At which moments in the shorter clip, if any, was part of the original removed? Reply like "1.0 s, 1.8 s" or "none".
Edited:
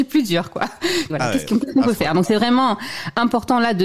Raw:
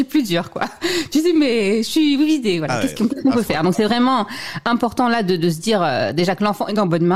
1.1 s